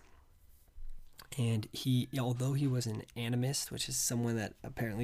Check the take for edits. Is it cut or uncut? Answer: uncut